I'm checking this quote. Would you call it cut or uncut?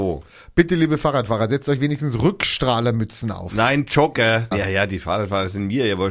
cut